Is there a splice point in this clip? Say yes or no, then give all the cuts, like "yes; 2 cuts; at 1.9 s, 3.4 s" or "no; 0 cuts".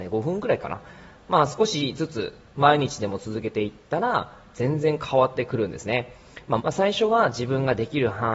yes; 2 cuts; at 1.1 s, 6.6 s